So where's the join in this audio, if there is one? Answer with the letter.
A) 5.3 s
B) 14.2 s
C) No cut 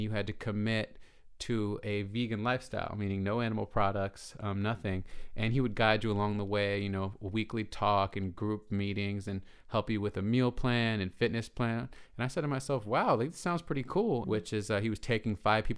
B